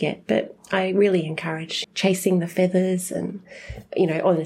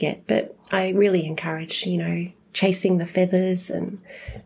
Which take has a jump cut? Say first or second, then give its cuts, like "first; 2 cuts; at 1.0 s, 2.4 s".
first; 1 cut; at 1.8 s